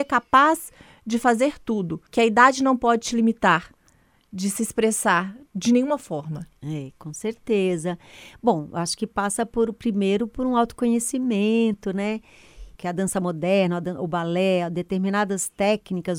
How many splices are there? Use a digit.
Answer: 2